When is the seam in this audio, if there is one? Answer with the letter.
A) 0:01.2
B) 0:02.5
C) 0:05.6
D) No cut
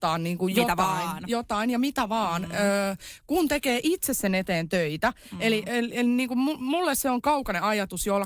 D